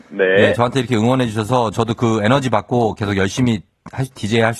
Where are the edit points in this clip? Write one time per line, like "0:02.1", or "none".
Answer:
none